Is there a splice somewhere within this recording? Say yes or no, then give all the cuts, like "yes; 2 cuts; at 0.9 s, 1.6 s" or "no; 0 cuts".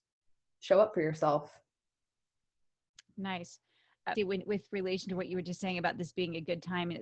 yes; 1 cut; at 4.2 s